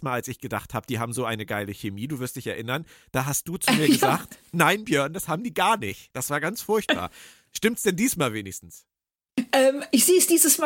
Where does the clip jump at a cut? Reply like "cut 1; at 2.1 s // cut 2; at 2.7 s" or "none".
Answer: none